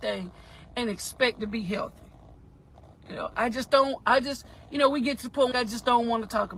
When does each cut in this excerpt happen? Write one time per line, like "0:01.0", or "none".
0:05.5